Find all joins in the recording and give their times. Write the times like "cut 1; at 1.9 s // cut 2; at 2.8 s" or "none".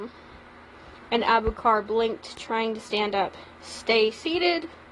cut 1; at 3.5 s